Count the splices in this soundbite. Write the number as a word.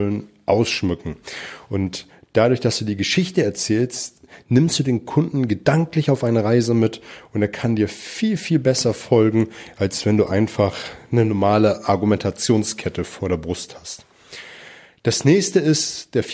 zero